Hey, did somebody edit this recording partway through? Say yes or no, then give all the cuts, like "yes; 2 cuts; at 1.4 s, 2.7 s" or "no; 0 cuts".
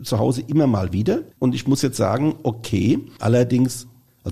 yes; 2 cuts; at 1.3 s, 3.2 s